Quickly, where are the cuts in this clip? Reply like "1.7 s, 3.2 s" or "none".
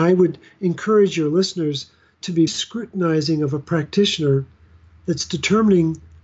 2.5 s